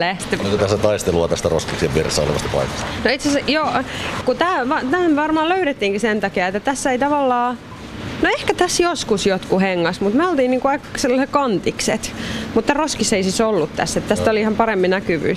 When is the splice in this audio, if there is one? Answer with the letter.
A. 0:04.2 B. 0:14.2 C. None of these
A